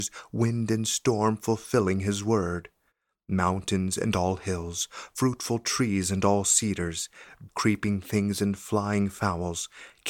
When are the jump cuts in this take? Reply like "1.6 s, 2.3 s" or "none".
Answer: 7.5 s

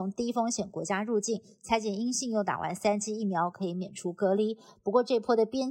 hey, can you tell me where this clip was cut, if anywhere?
none

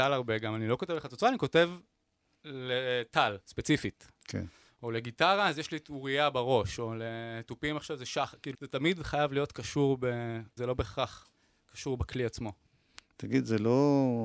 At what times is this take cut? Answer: 8.5 s, 10.6 s

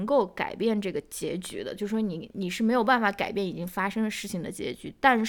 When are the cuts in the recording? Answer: 2.3 s

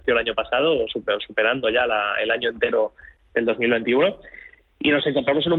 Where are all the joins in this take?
none

